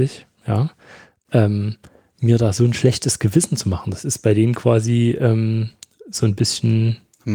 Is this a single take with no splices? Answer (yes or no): yes